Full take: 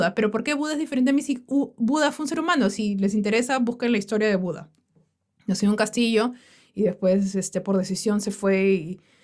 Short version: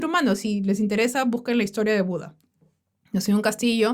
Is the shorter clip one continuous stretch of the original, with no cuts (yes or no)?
yes